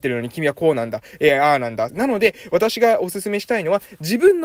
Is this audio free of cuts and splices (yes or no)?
no